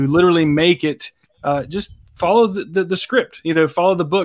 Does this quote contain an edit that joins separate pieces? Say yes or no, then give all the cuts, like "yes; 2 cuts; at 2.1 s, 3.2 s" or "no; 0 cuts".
no; 0 cuts